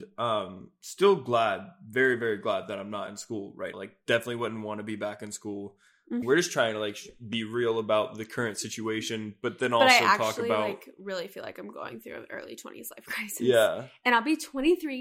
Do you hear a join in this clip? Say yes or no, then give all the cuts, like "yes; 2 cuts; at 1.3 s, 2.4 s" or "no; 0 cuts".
yes; 2 cuts; at 3.7 s, 6.2 s